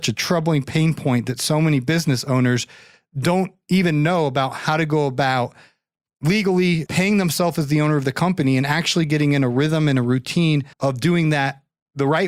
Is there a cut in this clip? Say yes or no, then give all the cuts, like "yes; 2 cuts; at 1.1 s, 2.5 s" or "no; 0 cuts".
yes; 2 cuts; at 6.9 s, 10.7 s